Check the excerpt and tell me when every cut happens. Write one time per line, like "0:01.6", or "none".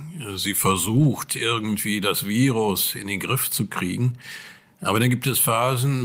none